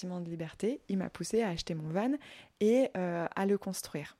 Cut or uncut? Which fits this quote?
uncut